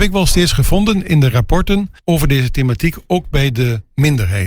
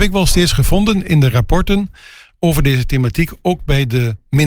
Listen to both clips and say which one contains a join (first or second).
first